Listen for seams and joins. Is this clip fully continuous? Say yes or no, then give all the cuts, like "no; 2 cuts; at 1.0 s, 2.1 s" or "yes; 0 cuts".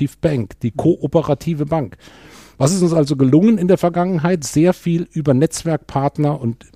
yes; 0 cuts